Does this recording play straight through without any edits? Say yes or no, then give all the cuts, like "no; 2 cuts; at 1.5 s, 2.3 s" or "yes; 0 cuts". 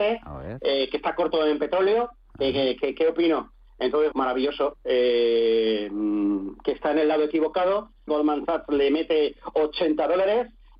no; 2 cuts; at 4.1 s, 8.1 s